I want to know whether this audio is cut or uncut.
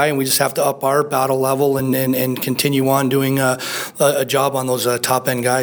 uncut